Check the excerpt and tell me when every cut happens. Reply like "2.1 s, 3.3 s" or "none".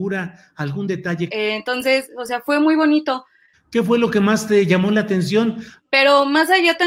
1.3 s, 3.5 s, 5.8 s